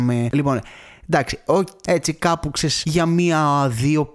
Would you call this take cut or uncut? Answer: cut